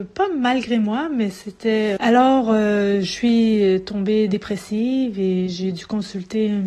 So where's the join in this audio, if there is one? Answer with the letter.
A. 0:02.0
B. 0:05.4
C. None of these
A